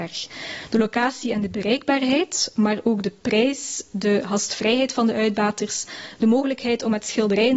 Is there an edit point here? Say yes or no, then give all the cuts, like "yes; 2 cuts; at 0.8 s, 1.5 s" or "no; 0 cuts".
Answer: no; 0 cuts